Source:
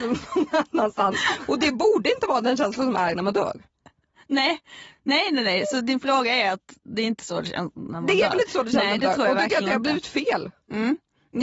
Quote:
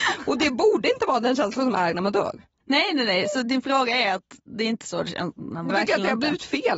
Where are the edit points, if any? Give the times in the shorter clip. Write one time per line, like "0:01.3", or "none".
0:02.6
0:05.7

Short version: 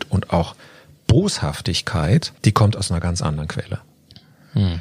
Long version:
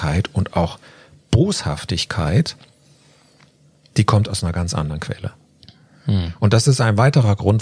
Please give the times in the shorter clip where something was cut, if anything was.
0:02.4

